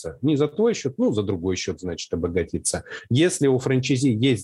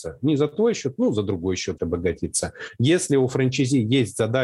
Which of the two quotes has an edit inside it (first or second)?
second